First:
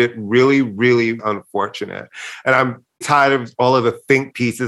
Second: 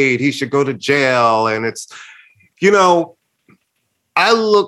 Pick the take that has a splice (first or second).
first